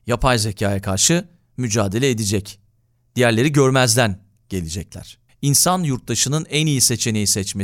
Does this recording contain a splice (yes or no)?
yes